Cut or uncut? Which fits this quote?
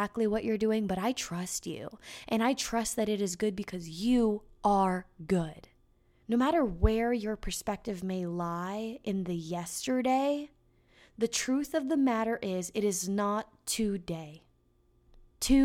cut